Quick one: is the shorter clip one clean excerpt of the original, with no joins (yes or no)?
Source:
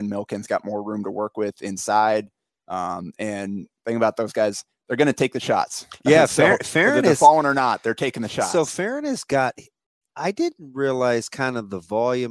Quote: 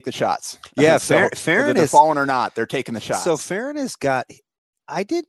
yes